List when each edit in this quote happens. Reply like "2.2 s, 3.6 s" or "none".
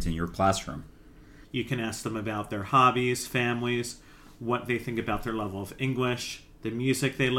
1.4 s